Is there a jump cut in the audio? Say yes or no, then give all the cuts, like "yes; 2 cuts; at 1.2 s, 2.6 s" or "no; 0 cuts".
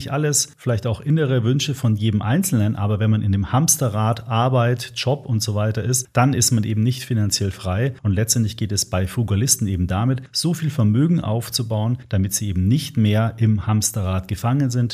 no; 0 cuts